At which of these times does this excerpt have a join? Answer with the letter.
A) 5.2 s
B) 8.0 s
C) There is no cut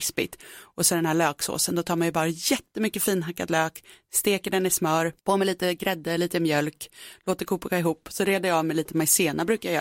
A